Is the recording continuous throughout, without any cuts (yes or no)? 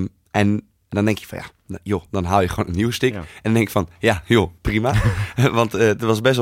no